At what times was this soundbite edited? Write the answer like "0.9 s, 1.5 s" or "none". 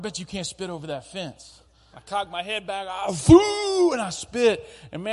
1.9 s